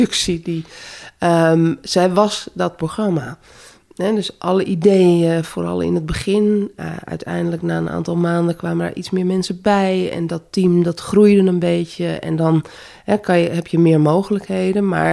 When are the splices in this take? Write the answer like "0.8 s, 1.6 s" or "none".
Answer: none